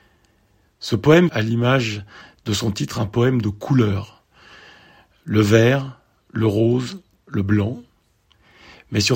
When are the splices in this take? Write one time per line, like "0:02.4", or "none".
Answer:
0:01.3